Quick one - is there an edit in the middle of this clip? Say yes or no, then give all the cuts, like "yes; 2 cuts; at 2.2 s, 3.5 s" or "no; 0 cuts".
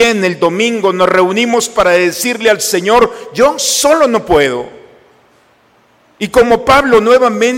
no; 0 cuts